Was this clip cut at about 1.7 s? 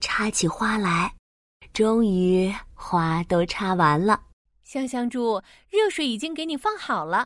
no; 0 cuts

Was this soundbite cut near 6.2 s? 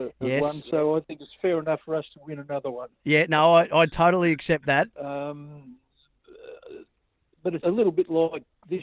no; 2 cuts; at 4.9 s, 7.6 s

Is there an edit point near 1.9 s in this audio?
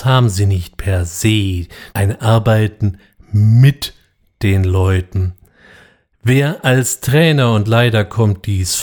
yes; 1 cut; at 1.9 s

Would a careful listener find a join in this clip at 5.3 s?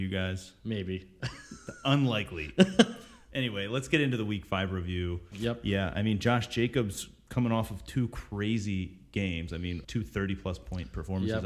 yes; 2 cuts; at 5.3 s, 9.8 s

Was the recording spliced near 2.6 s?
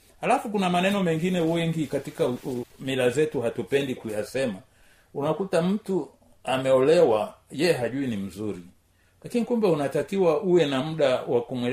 yes; 1 cut; at 2.6 s

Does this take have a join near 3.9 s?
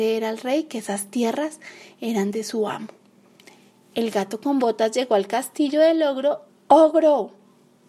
no; 1 cut; at 6.5 s

